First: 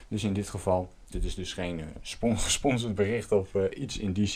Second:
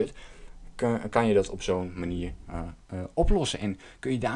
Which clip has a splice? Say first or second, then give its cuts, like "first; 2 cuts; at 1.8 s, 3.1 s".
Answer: first; 1 cut; at 1.1 s